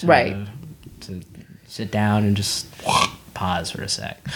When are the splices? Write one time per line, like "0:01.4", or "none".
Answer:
none